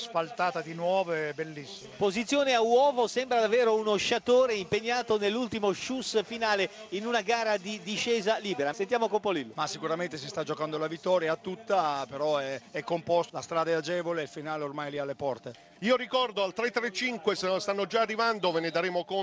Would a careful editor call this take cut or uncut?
cut